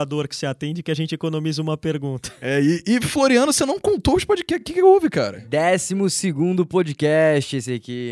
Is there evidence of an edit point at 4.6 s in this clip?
no; 0 cuts

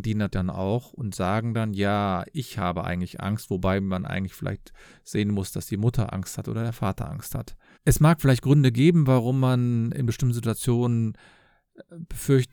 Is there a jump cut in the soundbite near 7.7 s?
yes; 1 cut; at 7.7 s

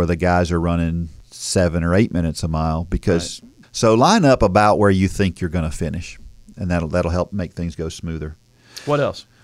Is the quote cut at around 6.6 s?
no; 1 cut; at 3.6 s

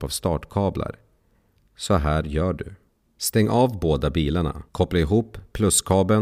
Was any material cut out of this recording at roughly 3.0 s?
no; 1 cut; at 4.7 s

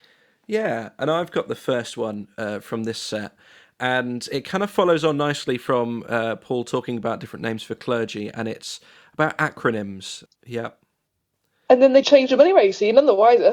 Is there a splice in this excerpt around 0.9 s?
no; 2 cuts; at 10.3 s, 12.0 s

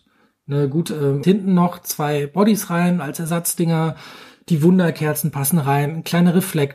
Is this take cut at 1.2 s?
yes; 1 cut; at 1.2 s

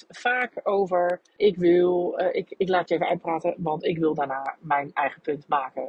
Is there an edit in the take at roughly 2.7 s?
no; 1 cut; at 1.4 s

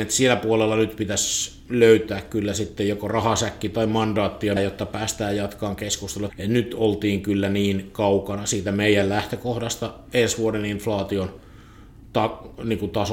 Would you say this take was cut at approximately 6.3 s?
yes; 2 cuts; at 4.6 s, 6.3 s

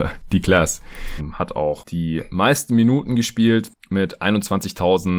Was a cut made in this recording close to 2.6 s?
no; 1 cut; at 1.2 s

